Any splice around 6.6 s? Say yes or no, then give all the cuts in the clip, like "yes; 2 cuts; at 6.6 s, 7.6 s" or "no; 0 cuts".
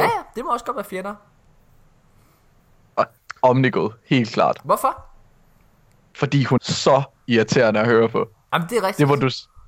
yes; 1 cut; at 6.6 s